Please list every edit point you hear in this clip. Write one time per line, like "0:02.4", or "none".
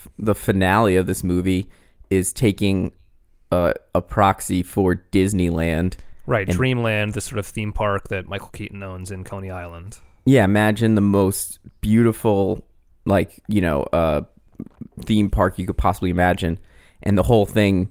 none

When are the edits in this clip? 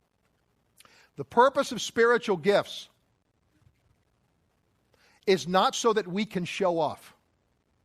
none

